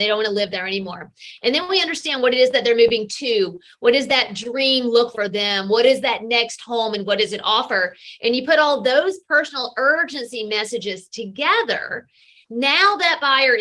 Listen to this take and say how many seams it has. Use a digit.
1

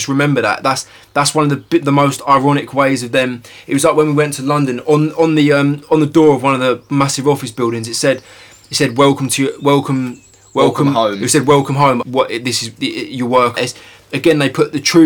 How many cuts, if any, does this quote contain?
2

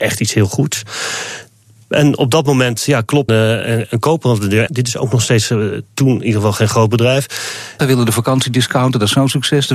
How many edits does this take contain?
3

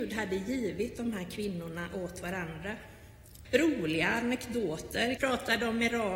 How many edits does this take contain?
2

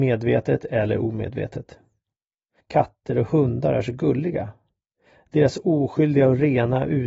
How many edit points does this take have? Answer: 1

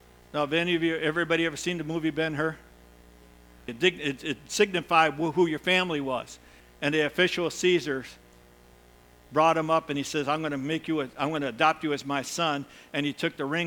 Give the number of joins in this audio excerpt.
2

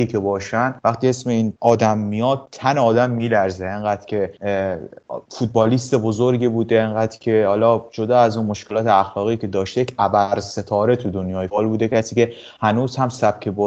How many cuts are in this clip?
1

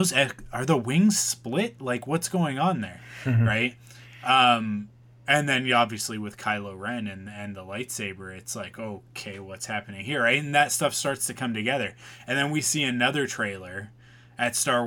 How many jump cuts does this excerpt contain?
0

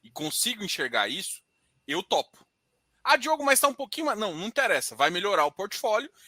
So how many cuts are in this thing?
0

